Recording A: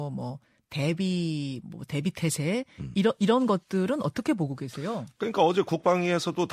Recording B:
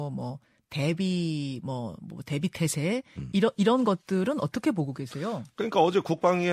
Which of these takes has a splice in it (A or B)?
A